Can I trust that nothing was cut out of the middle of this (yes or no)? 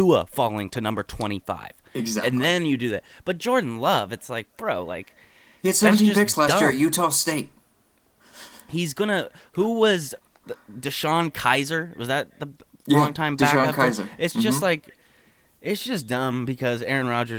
yes